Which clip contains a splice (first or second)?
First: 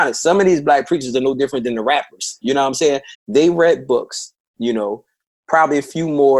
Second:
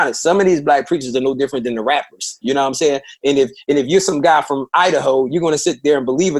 first